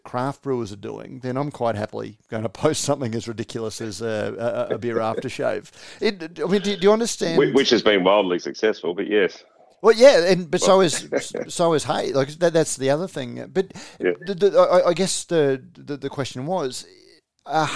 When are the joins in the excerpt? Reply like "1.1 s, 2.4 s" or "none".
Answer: none